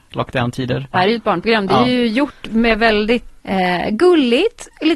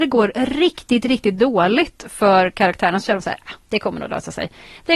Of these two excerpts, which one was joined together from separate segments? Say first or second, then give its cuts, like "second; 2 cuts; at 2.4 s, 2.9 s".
first; 2 cuts; at 0.9 s, 3.4 s